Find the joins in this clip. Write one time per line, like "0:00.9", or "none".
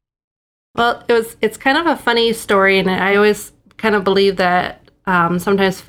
none